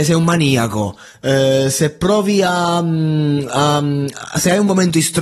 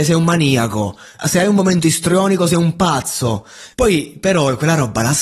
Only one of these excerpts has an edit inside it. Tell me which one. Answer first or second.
second